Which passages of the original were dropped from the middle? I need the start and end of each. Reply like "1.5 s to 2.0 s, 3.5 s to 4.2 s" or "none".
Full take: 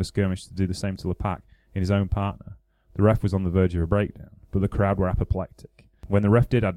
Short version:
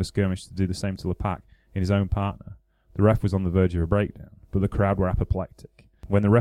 none